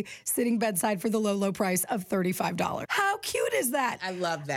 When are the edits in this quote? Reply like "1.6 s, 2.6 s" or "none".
2.8 s